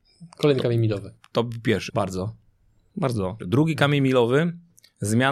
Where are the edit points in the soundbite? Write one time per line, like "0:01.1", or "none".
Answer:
0:01.9
0:03.4